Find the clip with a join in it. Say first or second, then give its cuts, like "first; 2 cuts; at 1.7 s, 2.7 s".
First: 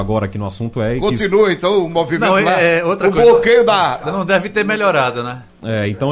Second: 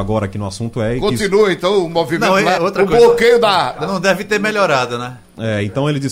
second; 1 cut; at 2.6 s